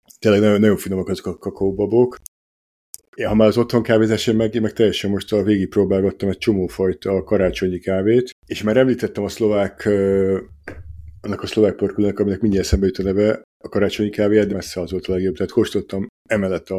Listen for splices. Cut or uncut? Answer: cut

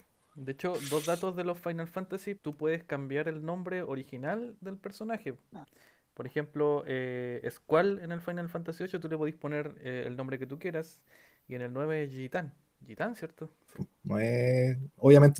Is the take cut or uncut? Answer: cut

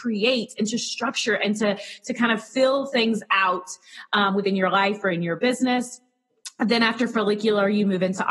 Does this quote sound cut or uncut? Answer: uncut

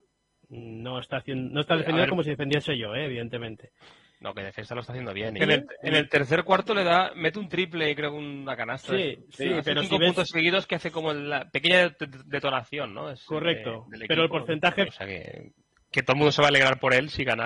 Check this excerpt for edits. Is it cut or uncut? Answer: cut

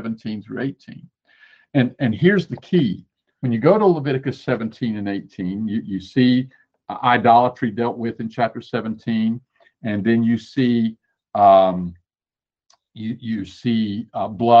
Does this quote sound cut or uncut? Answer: uncut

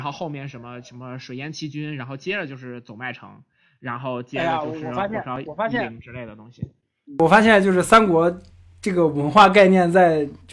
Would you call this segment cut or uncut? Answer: uncut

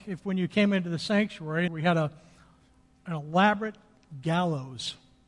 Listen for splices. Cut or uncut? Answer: cut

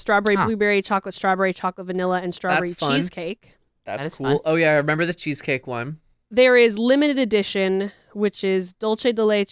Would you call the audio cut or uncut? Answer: uncut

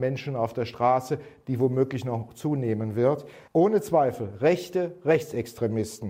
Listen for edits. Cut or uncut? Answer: cut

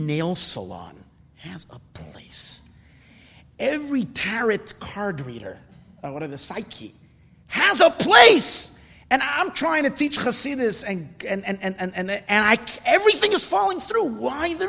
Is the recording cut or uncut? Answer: uncut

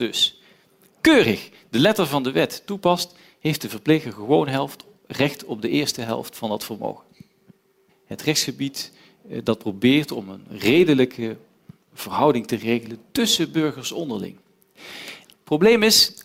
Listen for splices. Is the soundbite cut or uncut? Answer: cut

